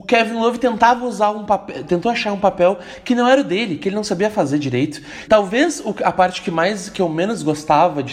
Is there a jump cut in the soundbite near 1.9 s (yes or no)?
no